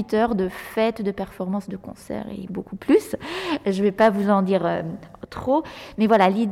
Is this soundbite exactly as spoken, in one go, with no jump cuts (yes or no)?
no